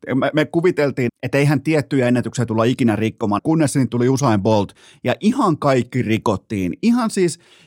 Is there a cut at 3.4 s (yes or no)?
yes